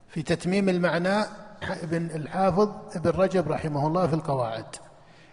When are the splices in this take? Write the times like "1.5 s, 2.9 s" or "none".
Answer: 1.6 s